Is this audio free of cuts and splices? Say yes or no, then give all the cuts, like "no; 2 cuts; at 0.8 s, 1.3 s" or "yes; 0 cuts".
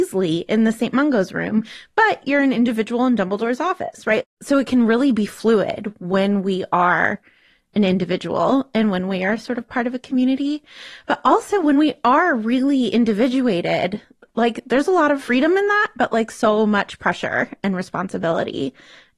yes; 0 cuts